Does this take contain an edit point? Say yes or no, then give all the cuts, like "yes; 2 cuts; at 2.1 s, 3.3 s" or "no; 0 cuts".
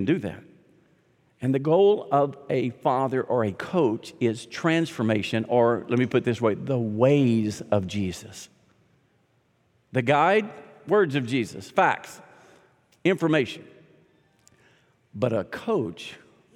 no; 0 cuts